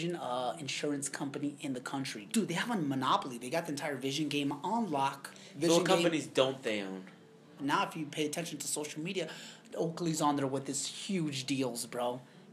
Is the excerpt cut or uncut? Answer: cut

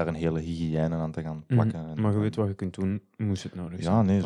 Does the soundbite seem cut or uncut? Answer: uncut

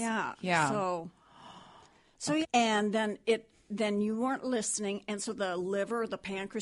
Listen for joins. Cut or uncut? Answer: cut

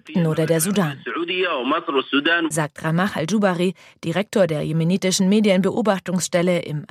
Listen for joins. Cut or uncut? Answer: uncut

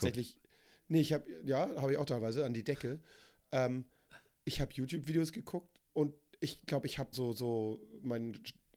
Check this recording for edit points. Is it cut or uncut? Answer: cut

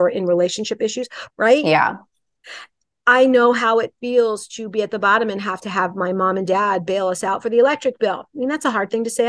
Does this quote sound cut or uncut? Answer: cut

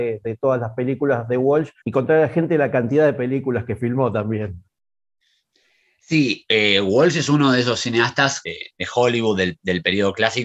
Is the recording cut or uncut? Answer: cut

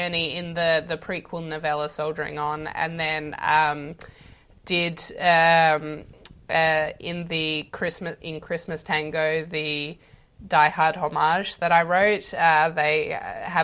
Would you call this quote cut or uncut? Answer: uncut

